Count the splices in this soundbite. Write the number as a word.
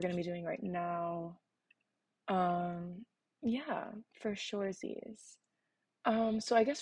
one